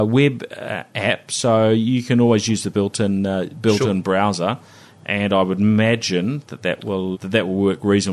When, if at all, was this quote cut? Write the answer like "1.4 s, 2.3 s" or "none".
7.1 s